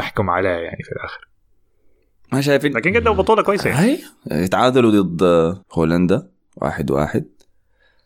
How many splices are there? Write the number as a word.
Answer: one